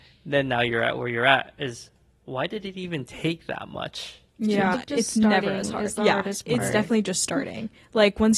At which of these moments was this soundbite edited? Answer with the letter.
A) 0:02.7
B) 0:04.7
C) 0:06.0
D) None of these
B